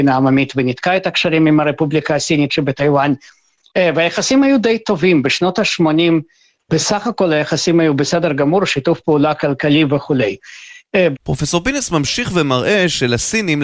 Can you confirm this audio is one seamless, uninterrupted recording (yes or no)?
no